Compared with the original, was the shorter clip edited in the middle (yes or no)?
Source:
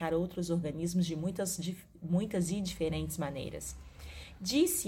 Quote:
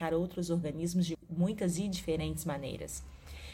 yes